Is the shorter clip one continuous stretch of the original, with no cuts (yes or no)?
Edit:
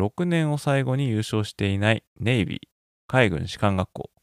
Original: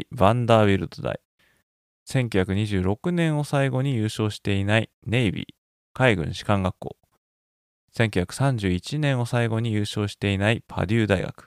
yes